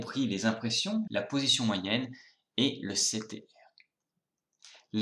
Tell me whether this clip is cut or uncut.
cut